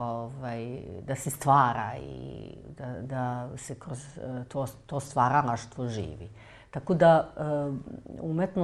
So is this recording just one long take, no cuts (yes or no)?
yes